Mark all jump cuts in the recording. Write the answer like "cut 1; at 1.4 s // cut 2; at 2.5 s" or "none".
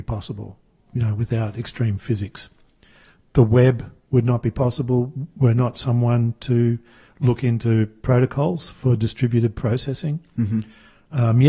none

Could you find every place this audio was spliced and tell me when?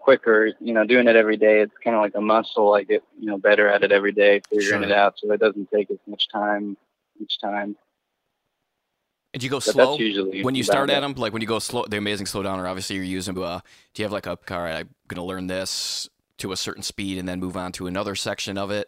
cut 1; at 13.3 s // cut 2; at 14.4 s

